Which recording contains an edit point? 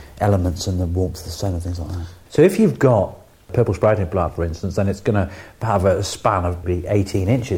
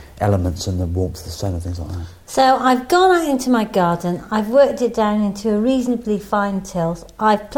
first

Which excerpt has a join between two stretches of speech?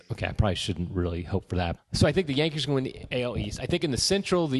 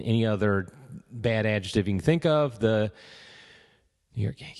first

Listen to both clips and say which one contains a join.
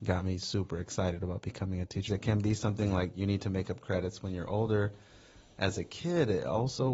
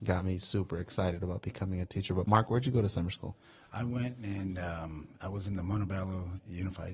first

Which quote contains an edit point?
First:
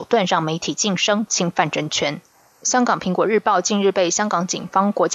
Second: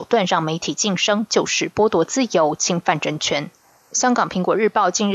first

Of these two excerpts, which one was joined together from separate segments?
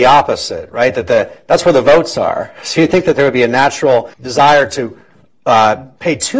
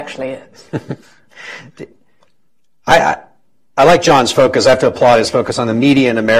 first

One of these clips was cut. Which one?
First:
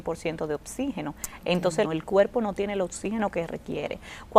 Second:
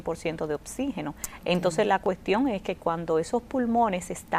first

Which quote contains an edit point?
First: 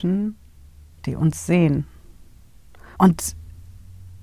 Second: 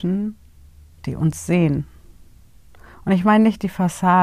first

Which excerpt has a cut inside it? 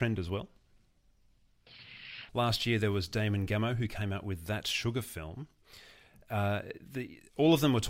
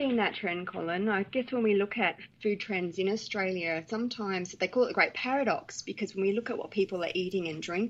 first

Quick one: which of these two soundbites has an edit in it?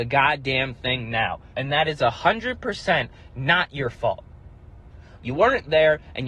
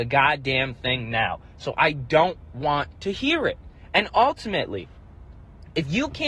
first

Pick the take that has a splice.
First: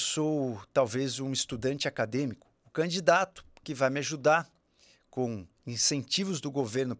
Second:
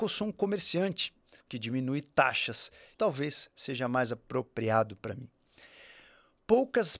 second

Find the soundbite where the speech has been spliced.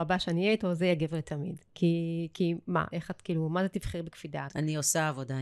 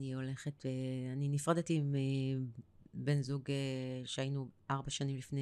first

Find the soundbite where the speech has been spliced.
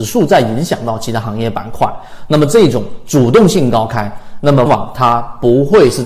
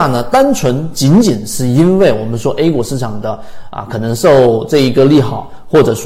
first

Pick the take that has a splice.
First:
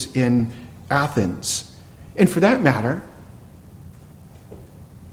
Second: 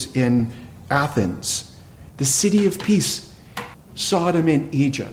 second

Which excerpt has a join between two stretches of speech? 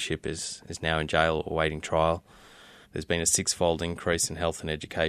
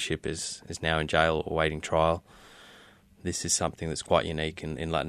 first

